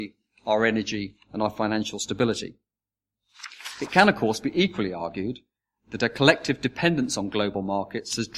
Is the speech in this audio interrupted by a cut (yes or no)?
no